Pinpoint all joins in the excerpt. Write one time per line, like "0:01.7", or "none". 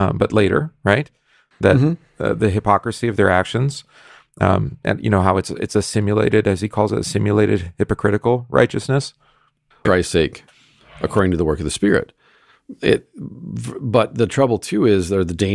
0:09.8